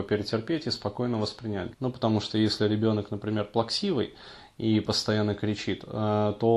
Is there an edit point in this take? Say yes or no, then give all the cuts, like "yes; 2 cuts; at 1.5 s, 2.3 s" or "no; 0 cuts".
yes; 1 cut; at 1.7 s